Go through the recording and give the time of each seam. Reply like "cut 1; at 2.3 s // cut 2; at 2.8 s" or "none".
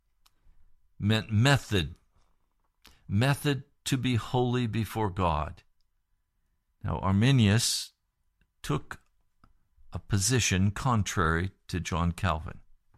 cut 1; at 6.7 s